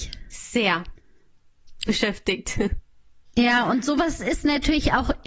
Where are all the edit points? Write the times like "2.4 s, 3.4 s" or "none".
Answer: 1.9 s